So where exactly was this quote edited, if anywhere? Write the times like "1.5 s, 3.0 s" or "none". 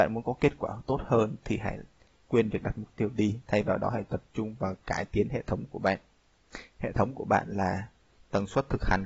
6.7 s